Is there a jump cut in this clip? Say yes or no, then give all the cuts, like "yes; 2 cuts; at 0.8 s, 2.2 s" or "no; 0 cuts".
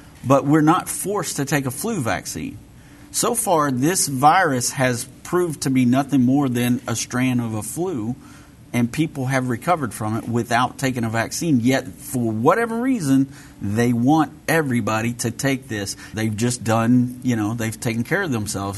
yes; 1 cut; at 16.1 s